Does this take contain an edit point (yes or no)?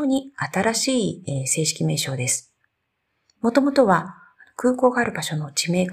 no